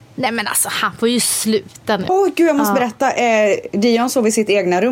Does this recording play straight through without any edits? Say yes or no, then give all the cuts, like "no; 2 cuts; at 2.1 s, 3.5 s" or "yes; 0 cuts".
no; 1 cut; at 2.1 s